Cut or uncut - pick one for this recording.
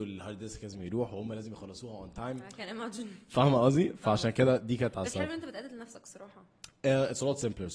uncut